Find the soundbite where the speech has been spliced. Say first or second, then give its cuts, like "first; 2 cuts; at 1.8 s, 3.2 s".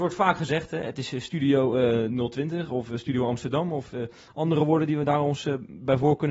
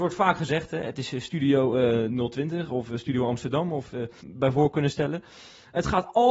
second; 1 cut; at 4.2 s